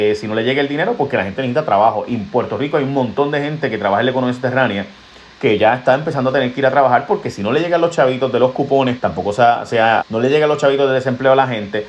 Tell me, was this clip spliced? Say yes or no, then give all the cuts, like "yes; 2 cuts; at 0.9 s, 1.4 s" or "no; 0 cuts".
yes; 2 cuts; at 9.0 s, 10.0 s